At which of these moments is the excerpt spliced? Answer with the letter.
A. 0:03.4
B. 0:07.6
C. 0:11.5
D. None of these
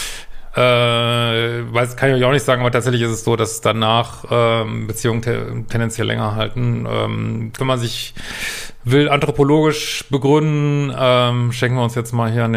B